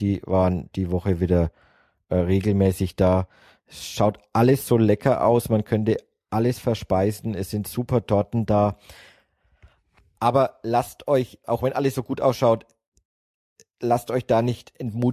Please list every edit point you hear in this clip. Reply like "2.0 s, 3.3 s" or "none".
11.4 s